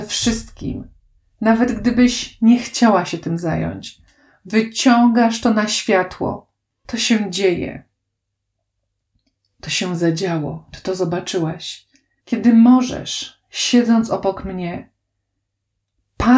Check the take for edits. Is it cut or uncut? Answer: cut